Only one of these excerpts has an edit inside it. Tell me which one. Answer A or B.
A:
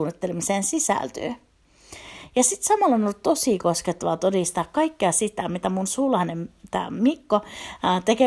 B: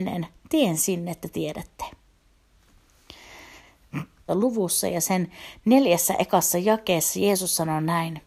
B